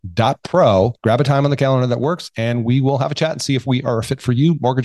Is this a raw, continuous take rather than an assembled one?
no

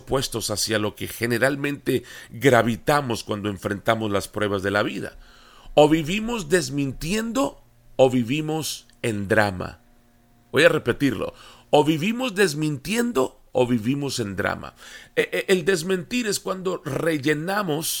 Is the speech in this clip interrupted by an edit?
no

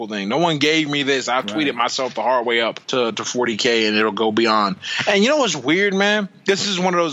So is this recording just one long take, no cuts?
no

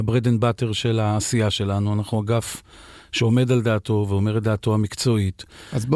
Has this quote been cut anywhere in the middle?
no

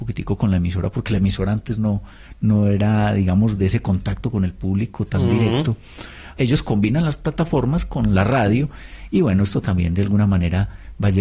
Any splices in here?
yes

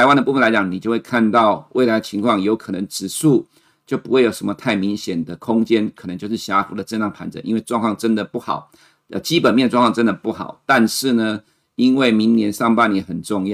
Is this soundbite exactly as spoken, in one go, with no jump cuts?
yes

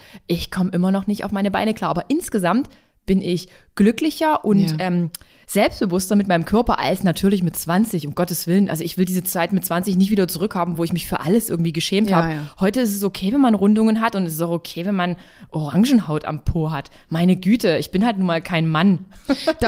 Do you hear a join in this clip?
no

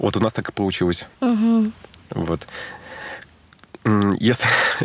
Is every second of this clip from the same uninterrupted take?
no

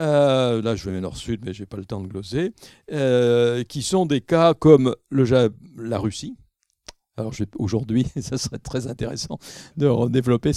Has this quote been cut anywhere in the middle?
no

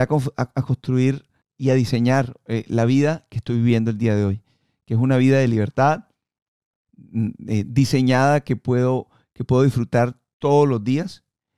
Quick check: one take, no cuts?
no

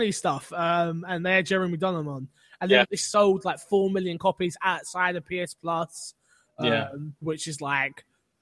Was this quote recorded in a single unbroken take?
no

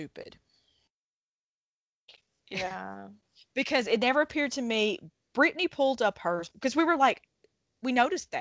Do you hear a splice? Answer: yes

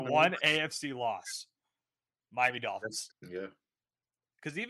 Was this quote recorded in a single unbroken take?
no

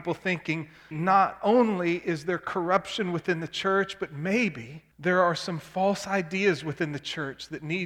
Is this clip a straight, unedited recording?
no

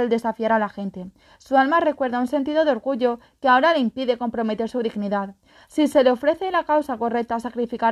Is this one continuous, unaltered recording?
yes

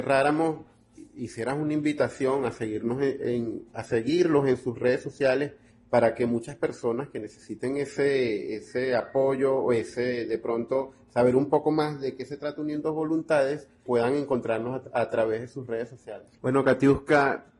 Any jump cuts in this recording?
yes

